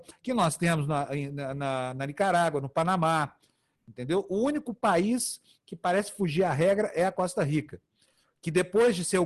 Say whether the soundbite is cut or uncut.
uncut